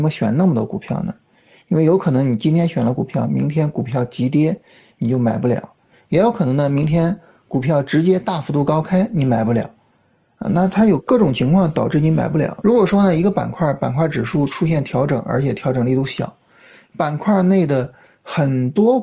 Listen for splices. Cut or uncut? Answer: cut